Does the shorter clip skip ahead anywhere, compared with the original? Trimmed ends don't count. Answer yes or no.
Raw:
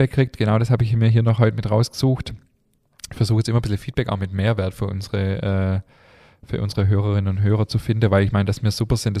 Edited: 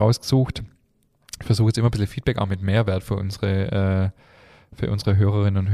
no